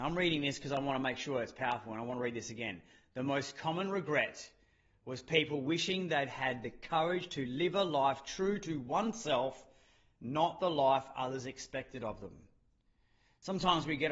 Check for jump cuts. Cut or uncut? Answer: uncut